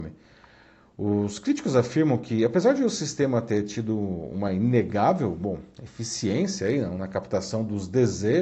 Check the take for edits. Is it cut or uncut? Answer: uncut